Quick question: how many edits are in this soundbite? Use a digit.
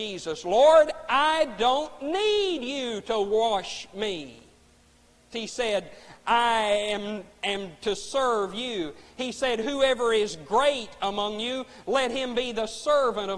1